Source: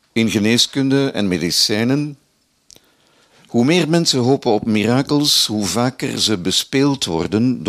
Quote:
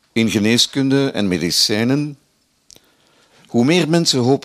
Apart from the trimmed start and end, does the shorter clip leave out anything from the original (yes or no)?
no